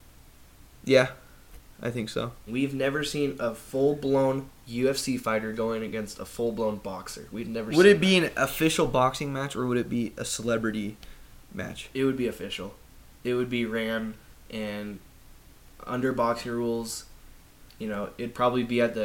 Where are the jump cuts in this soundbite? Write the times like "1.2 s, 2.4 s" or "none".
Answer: 2.5 s